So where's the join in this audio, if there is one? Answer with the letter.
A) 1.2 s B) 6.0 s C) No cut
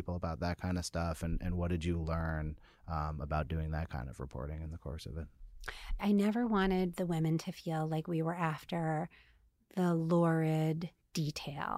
B